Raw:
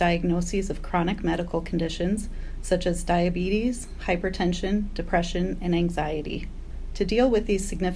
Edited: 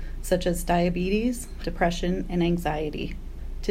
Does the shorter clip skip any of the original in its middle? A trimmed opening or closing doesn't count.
yes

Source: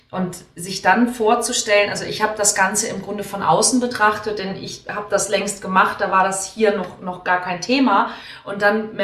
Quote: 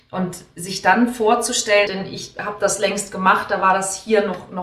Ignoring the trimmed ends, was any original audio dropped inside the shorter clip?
yes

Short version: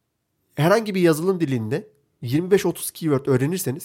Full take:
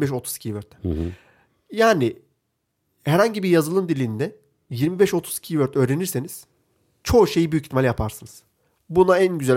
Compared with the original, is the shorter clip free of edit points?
yes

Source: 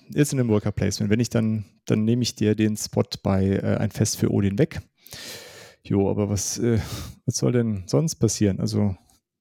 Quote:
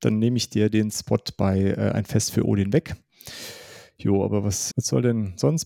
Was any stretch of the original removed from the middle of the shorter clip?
yes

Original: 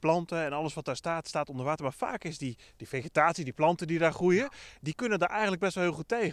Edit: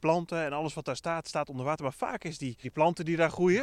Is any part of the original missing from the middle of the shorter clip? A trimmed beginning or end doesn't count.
yes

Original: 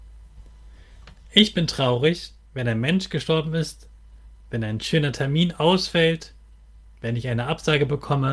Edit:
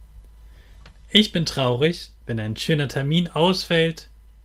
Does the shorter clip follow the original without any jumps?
no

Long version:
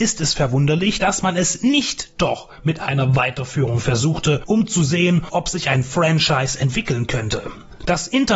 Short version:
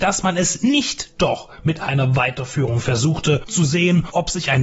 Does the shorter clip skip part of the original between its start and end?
yes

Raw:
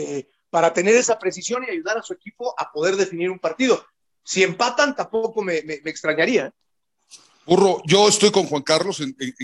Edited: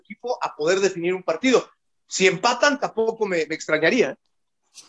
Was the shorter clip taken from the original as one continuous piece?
no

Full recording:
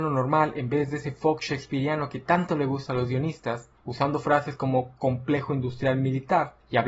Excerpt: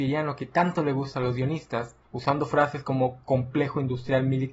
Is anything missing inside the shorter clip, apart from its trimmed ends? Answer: no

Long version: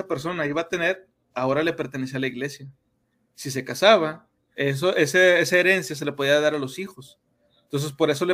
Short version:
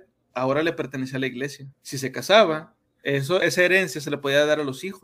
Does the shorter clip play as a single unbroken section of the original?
no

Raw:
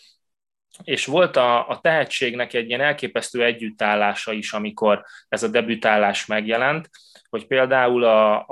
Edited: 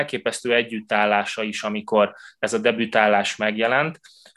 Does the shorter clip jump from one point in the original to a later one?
no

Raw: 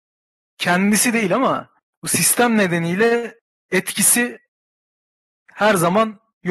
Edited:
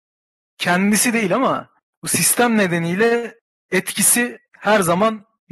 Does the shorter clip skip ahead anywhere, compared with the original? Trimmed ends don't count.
yes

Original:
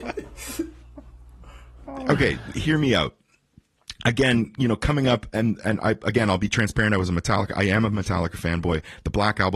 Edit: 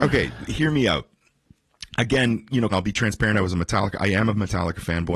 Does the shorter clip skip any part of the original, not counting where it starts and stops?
yes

